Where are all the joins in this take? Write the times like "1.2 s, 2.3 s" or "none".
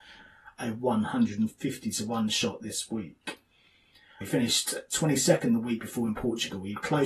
4.2 s